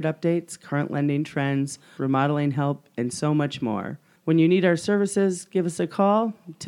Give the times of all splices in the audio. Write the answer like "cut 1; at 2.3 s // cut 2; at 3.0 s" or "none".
cut 1; at 2.0 s